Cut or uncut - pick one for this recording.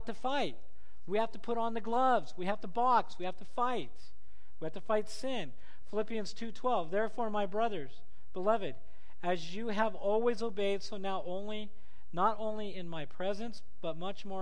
uncut